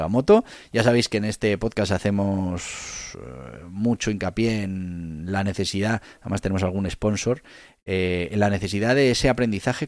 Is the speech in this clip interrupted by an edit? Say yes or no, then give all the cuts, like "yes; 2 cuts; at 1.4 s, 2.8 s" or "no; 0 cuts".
no; 0 cuts